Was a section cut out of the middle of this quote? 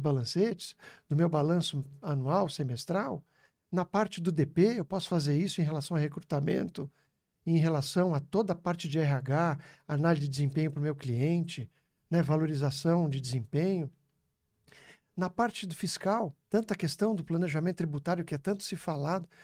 yes; 1 cut; at 16.4 s

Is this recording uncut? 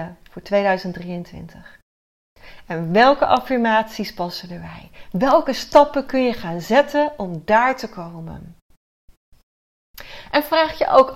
yes; 0 cuts

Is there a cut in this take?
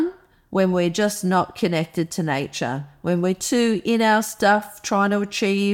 no; 0 cuts

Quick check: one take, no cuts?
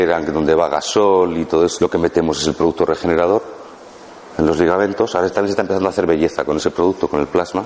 no; 1 cut; at 1.8 s

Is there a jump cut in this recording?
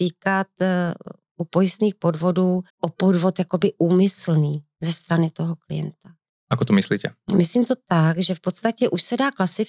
yes; 1 cut; at 2.7 s

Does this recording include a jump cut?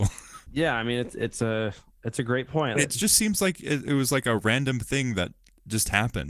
yes; 1 cut; at 2.7 s

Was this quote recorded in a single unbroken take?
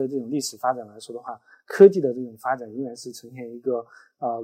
yes; 0 cuts

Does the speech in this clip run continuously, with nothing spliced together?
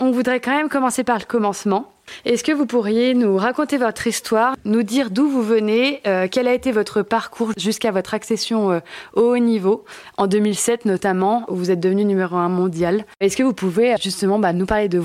no; 1 cut; at 14.0 s

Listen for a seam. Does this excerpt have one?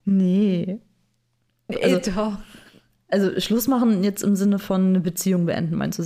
yes; 1 cut; at 1.7 s

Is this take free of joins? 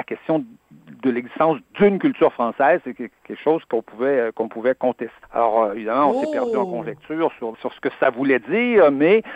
no; 2 cuts; at 5.2 s, 7.5 s

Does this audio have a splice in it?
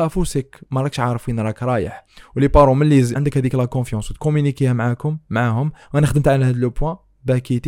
yes; 1 cut; at 3.2 s

